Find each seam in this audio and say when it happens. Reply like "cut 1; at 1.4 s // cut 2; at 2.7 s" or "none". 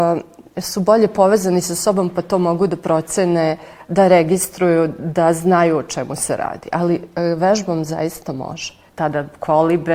cut 1; at 8.9 s